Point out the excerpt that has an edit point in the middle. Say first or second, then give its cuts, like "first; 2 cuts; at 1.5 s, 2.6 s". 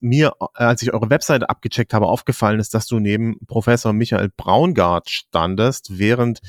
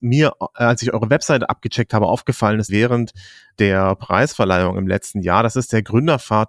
second; 1 cut; at 2.7 s